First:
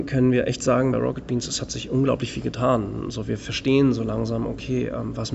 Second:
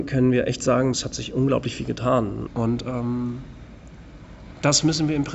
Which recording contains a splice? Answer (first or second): second